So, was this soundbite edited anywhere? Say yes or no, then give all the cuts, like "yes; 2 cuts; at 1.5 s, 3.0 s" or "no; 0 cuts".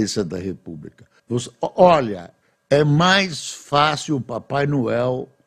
yes; 1 cut; at 1.2 s